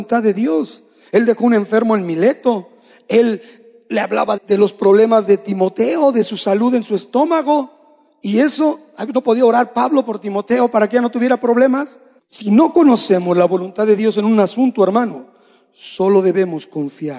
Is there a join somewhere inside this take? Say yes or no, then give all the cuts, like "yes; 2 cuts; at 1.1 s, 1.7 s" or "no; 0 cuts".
yes; 2 cuts; at 4.4 s, 12.2 s